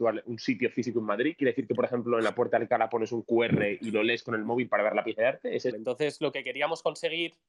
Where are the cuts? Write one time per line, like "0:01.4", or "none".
0:05.7